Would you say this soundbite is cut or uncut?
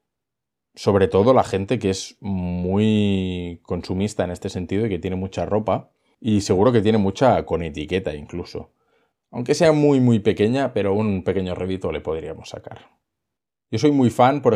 cut